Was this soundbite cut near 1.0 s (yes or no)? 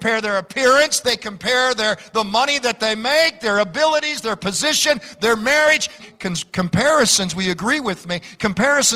yes